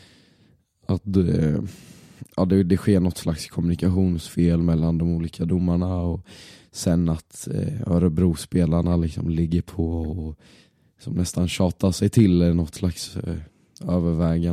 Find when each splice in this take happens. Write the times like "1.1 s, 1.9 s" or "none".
none